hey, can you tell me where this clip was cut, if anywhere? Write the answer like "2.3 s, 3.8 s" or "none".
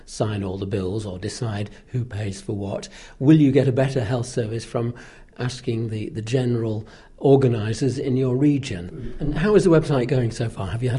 8.9 s